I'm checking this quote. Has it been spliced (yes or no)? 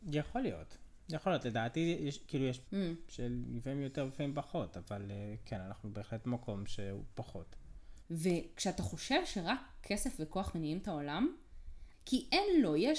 yes